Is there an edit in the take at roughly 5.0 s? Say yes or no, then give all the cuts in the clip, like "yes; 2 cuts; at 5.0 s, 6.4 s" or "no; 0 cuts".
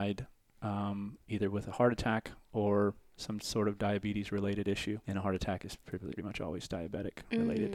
yes; 2 cuts; at 5.0 s, 6.2 s